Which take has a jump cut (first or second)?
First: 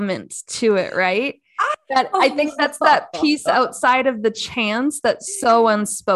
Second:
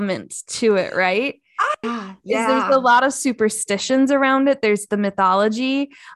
second